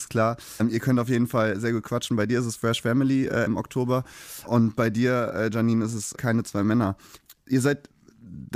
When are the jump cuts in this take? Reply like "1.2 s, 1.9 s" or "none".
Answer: 3.5 s